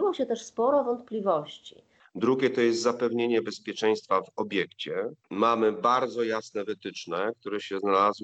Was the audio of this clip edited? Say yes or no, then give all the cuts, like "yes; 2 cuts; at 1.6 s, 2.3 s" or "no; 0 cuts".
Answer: yes; 2 cuts; at 2.0 s, 5.2 s